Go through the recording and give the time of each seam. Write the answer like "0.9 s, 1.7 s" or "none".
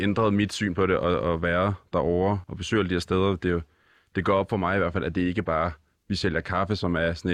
2.4 s